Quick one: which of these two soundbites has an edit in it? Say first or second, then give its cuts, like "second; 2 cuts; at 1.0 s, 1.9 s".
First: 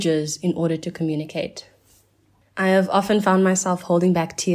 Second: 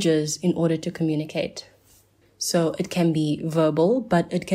second; 1 cut; at 2.2 s